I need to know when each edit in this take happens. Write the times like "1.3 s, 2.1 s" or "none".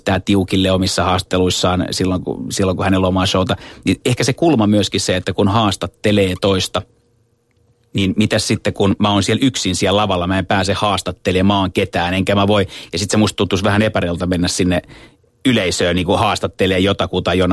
none